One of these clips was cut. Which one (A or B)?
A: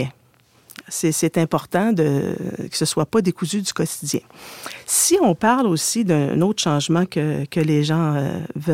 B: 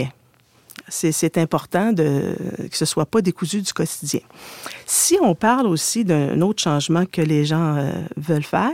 B